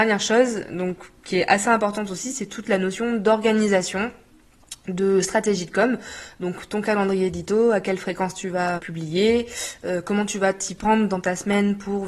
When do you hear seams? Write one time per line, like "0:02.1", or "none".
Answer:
0:08.8

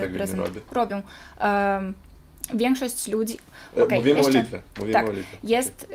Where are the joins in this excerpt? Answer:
none

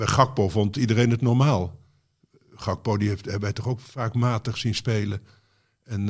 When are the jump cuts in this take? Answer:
none

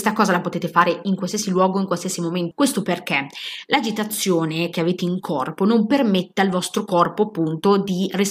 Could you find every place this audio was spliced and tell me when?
0:02.5

